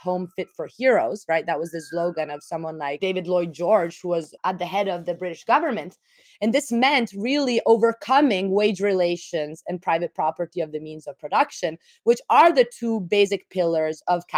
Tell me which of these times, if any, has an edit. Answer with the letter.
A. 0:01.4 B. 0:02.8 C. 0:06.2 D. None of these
C